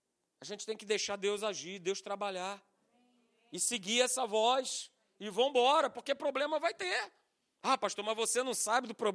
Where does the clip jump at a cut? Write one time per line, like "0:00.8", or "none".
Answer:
none